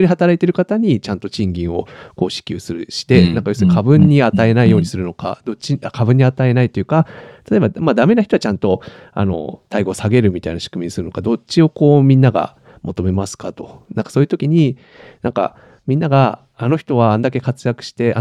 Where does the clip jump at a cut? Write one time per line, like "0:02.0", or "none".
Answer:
none